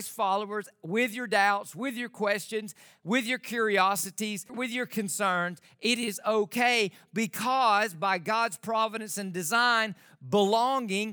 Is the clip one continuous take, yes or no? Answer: no